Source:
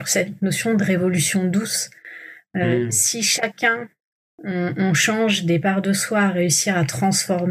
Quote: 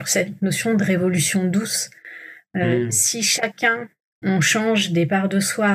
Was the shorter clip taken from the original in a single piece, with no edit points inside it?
no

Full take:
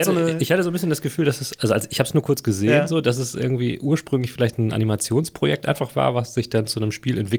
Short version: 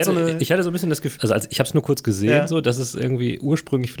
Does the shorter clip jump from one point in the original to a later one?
yes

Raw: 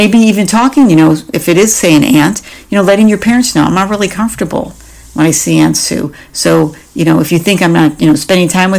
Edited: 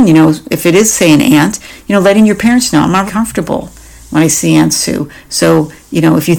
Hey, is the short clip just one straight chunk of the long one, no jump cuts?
no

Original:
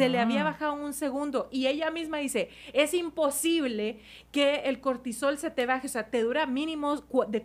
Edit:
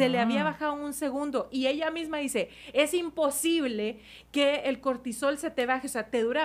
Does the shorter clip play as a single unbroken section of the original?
yes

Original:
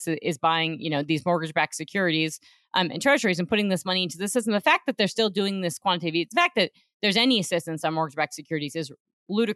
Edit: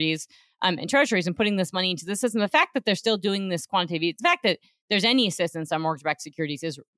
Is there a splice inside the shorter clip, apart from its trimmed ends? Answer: no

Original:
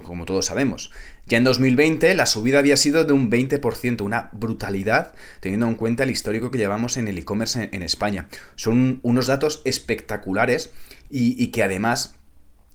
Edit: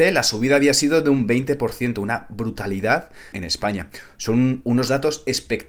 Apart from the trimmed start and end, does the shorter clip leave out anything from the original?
yes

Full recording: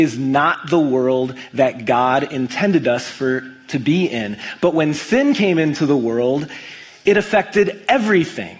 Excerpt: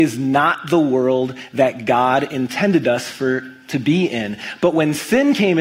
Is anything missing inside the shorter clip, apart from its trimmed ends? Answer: no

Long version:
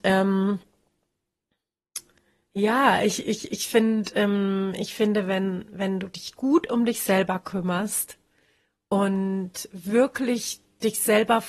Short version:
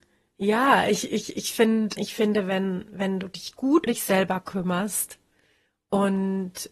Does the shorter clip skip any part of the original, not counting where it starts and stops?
yes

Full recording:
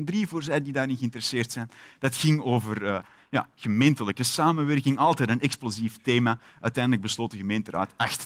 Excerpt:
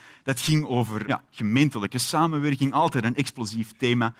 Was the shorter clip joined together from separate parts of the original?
yes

